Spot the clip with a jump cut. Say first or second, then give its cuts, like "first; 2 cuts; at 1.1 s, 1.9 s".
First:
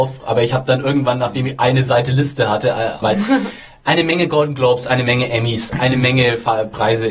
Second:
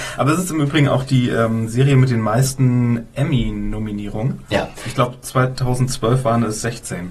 first; 1 cut; at 3.0 s